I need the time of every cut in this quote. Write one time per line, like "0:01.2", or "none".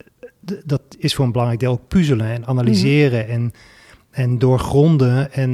none